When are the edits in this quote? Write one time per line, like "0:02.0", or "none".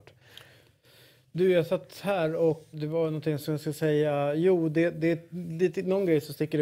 0:02.7